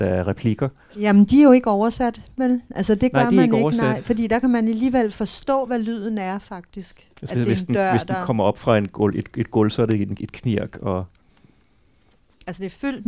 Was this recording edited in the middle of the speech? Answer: no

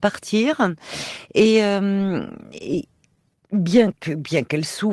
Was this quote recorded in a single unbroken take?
yes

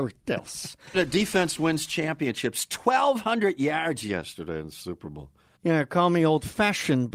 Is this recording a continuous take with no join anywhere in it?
no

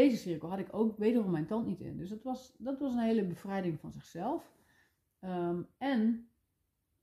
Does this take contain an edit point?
no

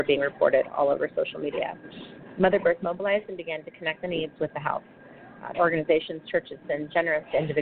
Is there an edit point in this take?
yes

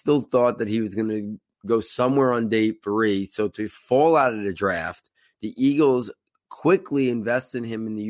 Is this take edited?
no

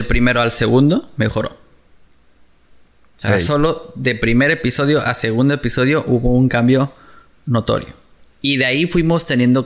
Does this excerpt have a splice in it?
no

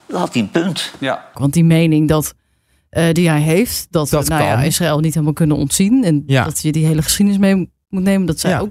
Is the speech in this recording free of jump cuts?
no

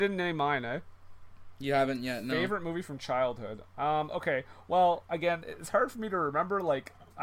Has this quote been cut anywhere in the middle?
no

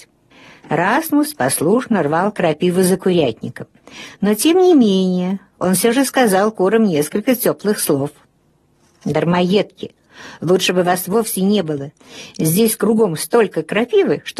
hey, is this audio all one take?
yes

